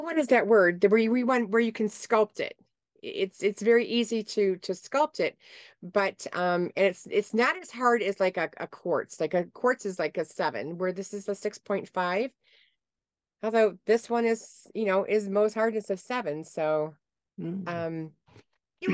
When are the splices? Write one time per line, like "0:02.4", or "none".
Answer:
none

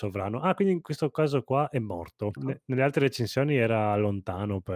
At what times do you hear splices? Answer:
0:02.4

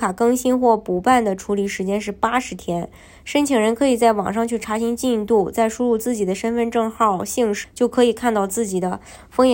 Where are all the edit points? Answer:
0:07.6

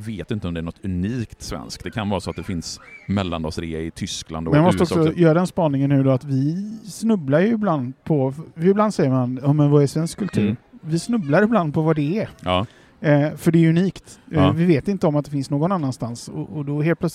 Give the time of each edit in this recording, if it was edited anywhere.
none

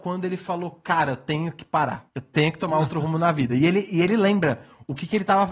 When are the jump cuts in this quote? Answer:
none

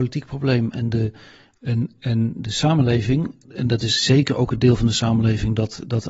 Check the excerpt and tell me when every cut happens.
0:03.4

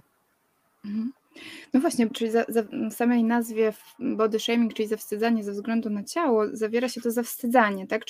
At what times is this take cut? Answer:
0:02.1

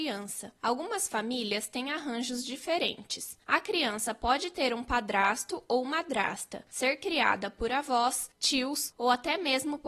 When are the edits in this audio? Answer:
none

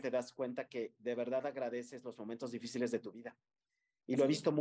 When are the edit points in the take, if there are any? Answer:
none

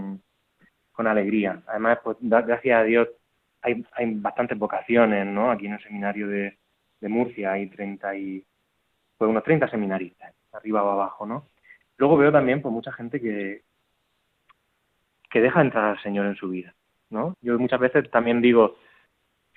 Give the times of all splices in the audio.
0:11.8
0:17.3

